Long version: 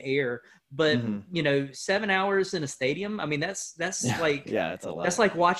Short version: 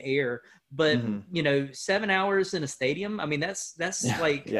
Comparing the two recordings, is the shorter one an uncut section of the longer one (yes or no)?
yes